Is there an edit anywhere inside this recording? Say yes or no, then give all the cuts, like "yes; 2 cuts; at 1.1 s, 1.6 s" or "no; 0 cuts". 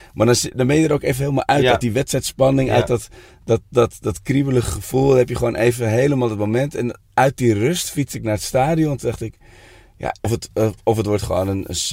yes; 1 cut; at 10.2 s